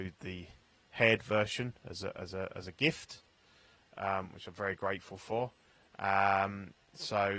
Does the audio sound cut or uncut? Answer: uncut